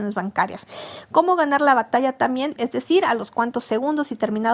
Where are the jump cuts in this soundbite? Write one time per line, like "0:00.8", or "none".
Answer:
0:02.6